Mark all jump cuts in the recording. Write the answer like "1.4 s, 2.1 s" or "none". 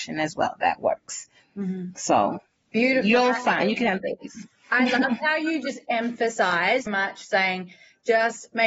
6.9 s